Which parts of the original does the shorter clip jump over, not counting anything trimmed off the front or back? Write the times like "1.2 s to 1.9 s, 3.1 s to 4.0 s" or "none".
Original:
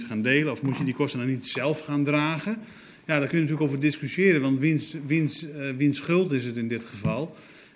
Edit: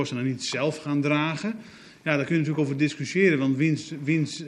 none

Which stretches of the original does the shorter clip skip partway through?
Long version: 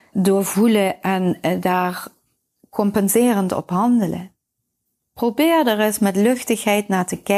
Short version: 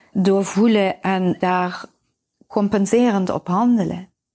1.4 s to 1.6 s

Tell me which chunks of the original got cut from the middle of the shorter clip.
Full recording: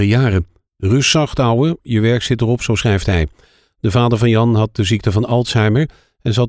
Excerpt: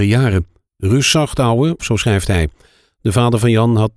1.8 s to 2.6 s

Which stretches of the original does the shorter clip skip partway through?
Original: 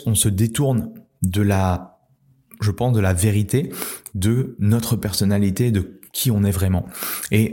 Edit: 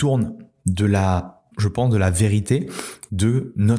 2.1 s to 2.5 s

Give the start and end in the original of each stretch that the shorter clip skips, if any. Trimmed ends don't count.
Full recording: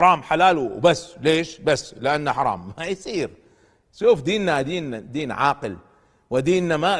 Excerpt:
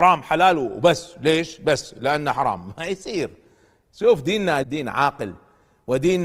4.6 s to 5.1 s

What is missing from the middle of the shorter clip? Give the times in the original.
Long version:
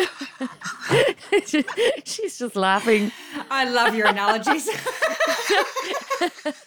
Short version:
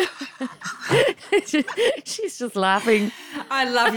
none

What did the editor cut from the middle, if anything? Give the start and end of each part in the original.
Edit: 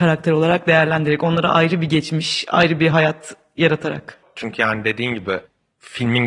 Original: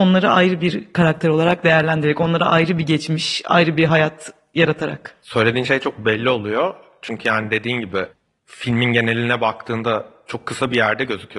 5.2 s to 6.9 s

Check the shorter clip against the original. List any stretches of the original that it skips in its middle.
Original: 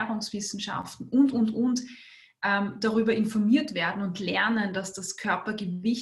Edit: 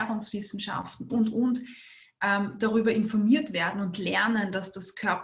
1.1 s to 1.3 s

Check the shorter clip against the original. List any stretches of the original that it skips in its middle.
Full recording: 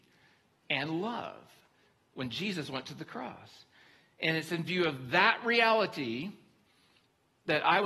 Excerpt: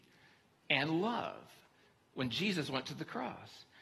none

